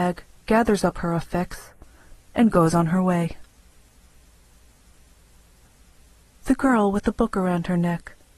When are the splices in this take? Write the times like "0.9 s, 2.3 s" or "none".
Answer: 2.2 s

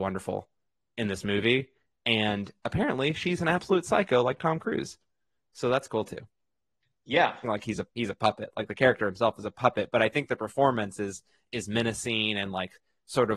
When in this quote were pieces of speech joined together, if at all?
7.4 s

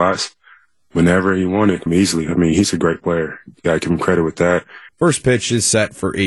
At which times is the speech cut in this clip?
1.9 s, 4.9 s

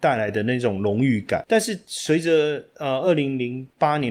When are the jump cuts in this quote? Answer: none

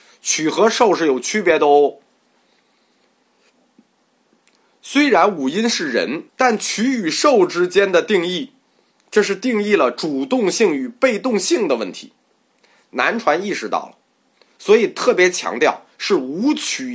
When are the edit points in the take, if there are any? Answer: 6.3 s

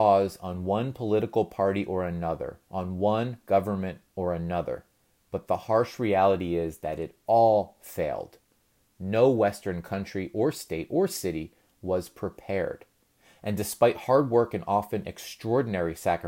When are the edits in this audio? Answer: none

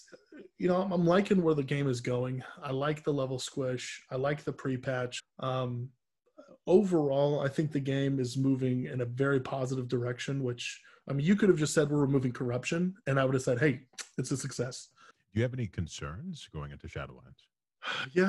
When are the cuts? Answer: 5.2 s, 15.1 s

